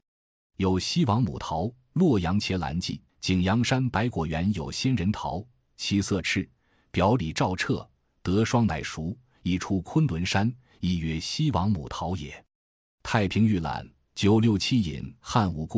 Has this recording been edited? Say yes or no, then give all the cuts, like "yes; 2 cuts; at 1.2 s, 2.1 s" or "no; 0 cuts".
yes; 1 cut; at 3.1 s